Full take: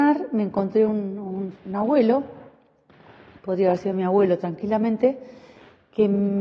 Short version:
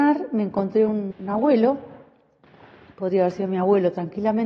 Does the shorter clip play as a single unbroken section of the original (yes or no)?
no